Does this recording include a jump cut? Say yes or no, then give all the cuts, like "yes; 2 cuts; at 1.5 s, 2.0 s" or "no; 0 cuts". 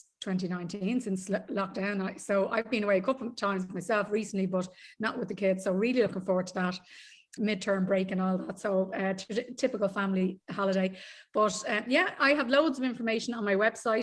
yes; 1 cut; at 7.4 s